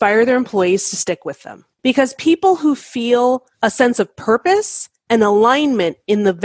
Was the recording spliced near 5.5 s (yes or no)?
no